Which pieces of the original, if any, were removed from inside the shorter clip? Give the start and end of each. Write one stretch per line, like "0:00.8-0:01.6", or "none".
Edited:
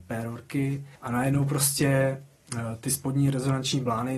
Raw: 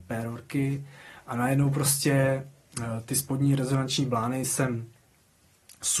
0:01.0-0:01.2

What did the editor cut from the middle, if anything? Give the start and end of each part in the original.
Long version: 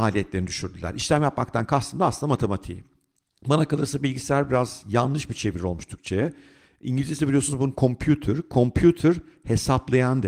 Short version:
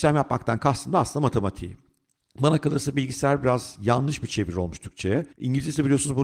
0:06.4-0:06.8

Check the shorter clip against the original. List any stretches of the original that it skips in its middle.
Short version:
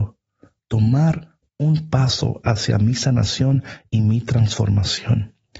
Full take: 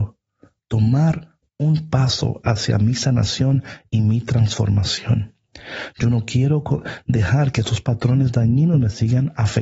none

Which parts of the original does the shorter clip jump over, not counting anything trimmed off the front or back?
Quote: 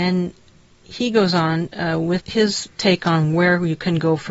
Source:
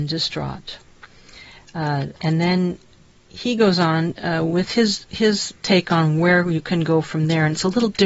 0:04.6-0:05.0

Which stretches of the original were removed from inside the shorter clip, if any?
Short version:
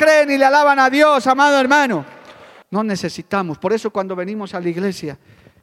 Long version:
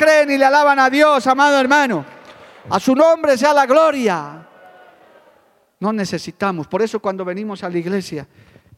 0:02.6-0:05.7

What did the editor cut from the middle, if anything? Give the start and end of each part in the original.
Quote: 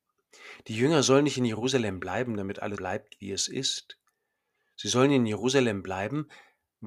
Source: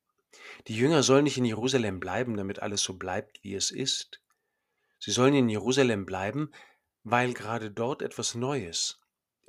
0:02.8-0:03.0

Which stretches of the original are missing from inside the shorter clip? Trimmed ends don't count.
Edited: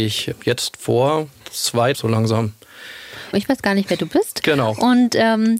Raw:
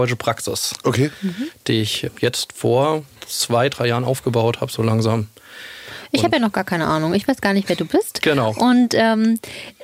0:03.7-0:04.7
0:06.1-0:07.1

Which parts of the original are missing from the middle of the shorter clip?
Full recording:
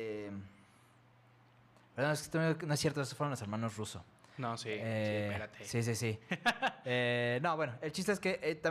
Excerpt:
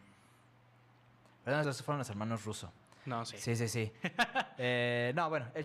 0:02.1-0:03.0
0:04.6-0:05.6

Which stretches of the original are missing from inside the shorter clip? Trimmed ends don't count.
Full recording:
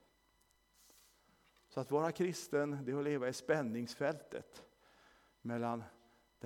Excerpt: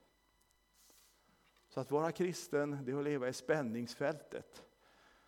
none

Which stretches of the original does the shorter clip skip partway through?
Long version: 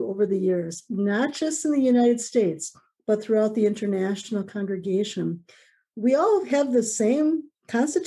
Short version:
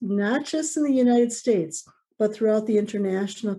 none

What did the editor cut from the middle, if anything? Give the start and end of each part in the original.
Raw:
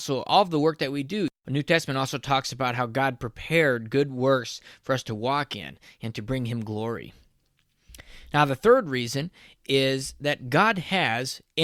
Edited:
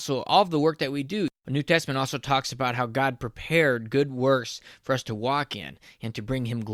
none

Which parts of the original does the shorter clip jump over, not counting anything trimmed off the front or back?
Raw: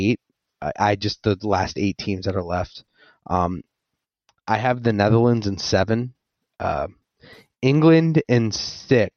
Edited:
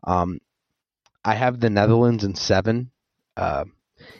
none

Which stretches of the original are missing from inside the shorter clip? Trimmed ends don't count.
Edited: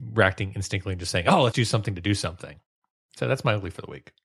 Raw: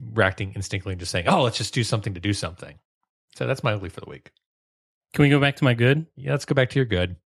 0:01.5-0:01.7

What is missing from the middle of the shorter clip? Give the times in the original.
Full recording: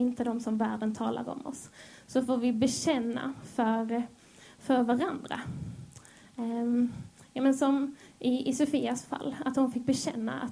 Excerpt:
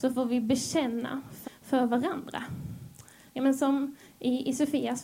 0:03.6-0:04.4
0:06.2-0:07.3

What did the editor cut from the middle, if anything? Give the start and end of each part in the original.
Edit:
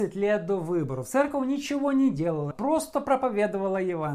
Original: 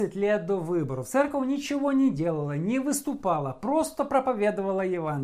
0:02.5-0:03.5

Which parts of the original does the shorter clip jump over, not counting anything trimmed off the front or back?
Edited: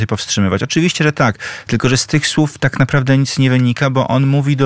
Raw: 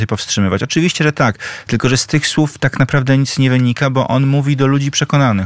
none

